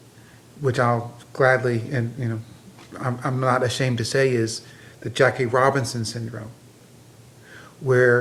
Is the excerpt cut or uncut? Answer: uncut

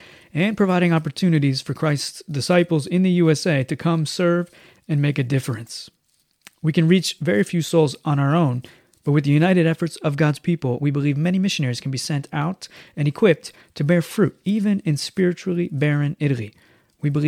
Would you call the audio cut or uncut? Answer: uncut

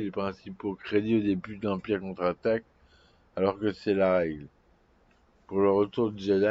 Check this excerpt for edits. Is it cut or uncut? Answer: cut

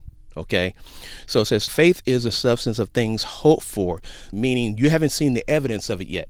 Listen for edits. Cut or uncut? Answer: cut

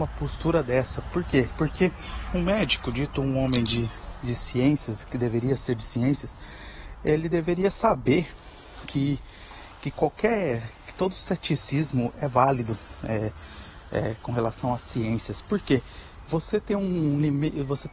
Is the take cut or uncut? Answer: uncut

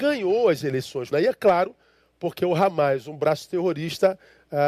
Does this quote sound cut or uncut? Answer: cut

